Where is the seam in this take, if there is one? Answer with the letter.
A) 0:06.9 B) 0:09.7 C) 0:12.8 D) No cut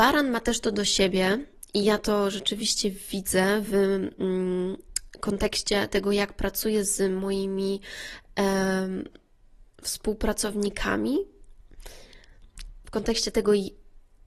B